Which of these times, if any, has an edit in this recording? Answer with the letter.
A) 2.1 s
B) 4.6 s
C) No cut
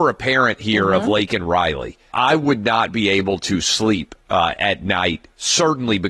A